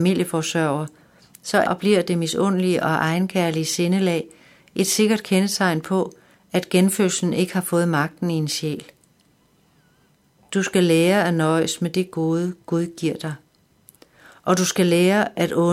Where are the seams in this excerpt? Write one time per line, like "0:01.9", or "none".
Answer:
0:01.7